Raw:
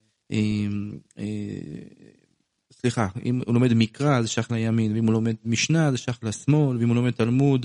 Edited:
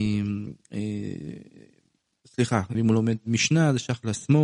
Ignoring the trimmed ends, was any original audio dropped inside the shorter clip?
yes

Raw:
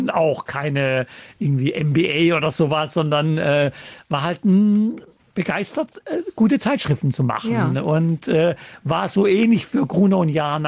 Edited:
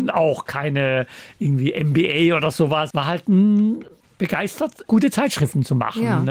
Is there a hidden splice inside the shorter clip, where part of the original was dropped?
yes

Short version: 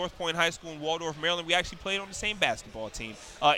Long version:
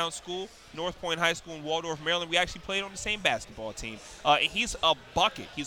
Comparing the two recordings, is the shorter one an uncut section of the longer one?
yes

